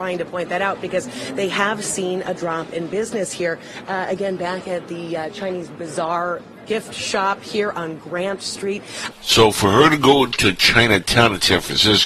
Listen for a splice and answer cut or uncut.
cut